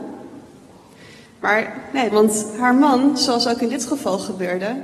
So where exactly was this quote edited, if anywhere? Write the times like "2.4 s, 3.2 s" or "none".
2.1 s